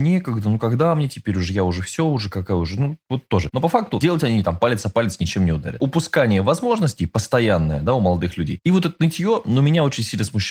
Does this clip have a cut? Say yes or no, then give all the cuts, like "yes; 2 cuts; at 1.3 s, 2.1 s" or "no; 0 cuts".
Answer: yes; 1 cut; at 3.5 s